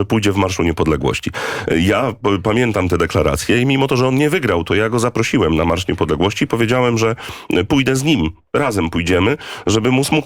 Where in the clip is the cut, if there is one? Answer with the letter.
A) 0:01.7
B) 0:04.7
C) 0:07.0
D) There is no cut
D